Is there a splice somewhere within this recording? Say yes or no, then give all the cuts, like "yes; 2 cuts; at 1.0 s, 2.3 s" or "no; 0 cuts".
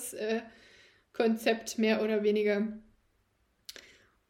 no; 0 cuts